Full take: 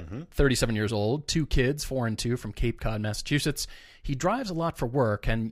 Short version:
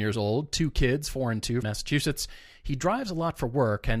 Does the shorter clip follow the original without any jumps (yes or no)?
no